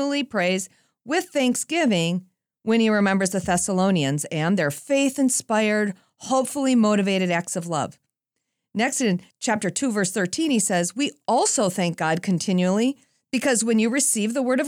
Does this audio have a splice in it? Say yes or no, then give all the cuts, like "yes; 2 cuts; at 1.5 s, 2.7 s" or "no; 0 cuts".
no; 0 cuts